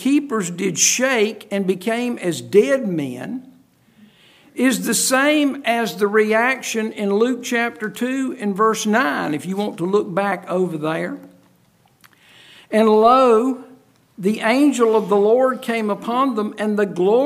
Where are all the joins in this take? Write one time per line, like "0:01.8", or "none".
none

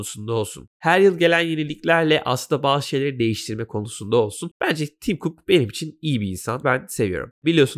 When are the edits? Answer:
0:06.6

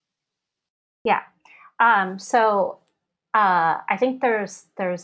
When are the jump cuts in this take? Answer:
none

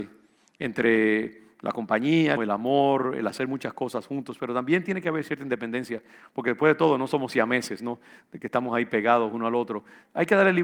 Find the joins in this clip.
0:02.4

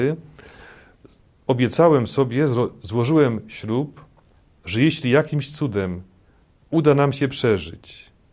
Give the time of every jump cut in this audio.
none

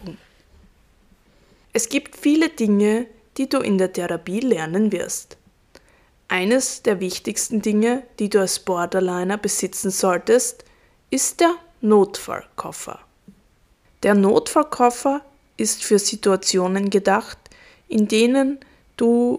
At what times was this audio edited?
0:01.6
0:13.8

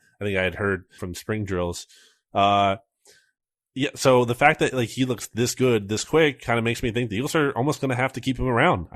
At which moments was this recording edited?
0:01.0

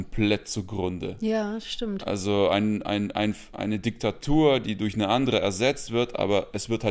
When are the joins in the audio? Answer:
none

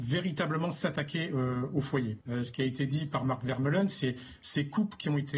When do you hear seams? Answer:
0:02.2

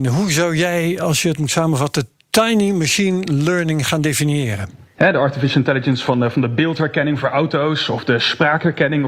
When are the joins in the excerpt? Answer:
0:05.0

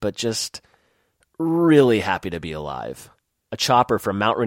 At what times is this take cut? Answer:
0:03.5

